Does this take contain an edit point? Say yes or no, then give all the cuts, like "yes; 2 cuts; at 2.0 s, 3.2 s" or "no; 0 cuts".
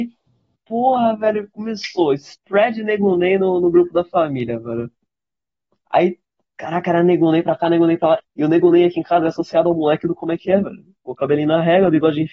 yes; 1 cut; at 8.2 s